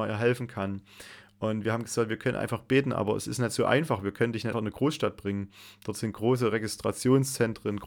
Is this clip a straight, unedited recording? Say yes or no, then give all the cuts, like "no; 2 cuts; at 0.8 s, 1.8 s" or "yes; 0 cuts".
no; 1 cut; at 4.5 s